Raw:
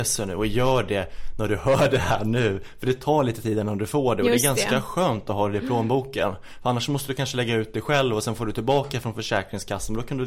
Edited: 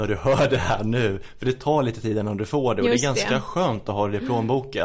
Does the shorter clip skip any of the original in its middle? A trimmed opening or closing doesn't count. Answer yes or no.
no